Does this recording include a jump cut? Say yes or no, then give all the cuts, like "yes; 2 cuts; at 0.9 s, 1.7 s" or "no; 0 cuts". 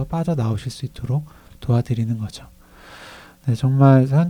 no; 0 cuts